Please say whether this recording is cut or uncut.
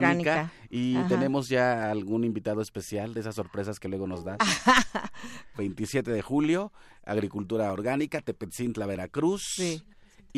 cut